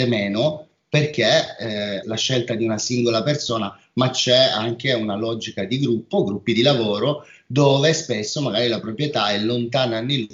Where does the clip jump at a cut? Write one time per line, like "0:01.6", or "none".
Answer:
0:02.0